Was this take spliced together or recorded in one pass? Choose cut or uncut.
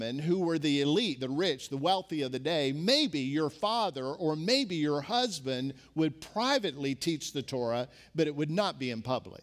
uncut